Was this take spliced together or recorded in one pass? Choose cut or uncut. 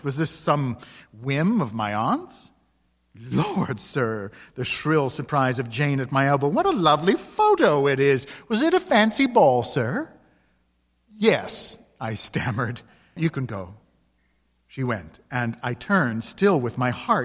cut